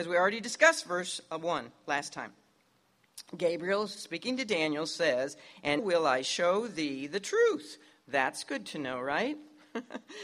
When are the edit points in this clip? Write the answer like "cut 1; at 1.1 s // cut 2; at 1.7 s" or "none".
cut 1; at 5.8 s